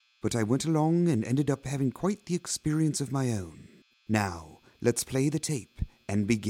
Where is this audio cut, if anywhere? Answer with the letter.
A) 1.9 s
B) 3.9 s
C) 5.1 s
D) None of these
B